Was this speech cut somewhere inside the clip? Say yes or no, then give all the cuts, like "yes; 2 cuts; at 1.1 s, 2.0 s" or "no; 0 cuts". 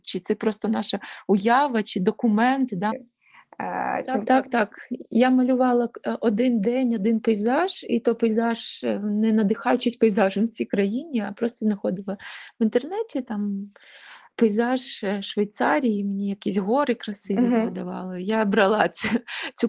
yes; 1 cut; at 2.9 s